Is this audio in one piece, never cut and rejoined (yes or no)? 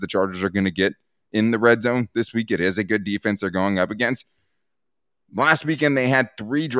yes